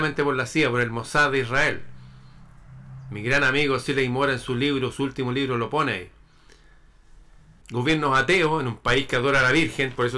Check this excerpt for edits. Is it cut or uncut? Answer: cut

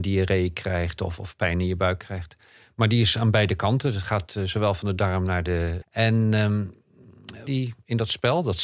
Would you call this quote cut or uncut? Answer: cut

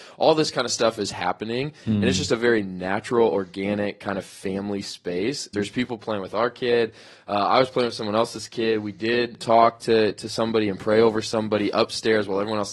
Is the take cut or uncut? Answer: cut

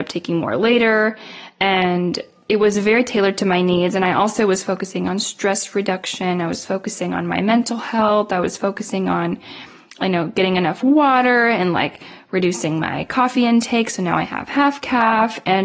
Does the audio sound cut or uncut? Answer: uncut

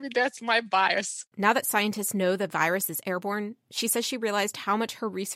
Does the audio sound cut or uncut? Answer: cut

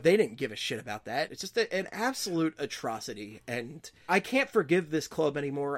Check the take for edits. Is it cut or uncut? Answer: cut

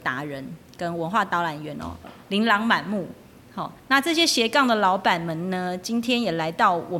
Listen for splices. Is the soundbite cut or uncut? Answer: cut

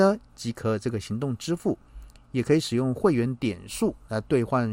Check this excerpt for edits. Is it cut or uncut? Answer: uncut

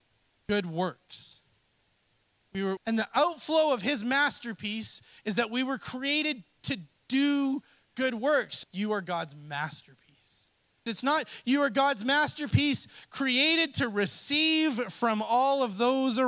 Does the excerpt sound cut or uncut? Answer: cut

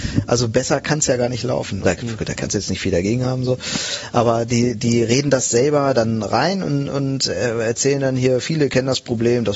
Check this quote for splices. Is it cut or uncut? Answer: cut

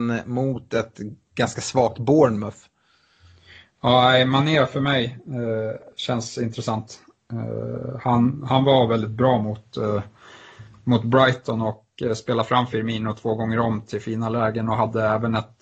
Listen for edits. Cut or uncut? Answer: uncut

